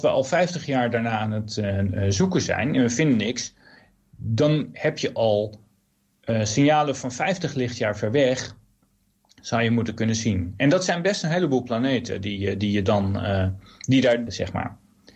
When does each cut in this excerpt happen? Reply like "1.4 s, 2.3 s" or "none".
14.3 s